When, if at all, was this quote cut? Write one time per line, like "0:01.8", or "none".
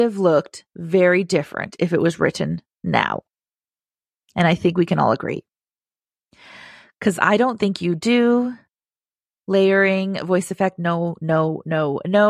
none